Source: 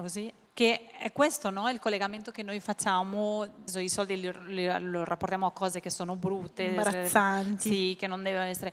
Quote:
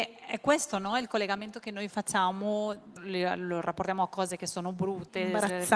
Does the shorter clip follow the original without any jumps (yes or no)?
no